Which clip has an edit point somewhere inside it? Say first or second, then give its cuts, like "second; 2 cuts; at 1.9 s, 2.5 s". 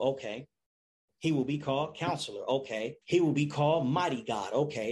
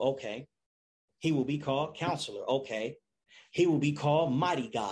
first; 1 cut; at 3.0 s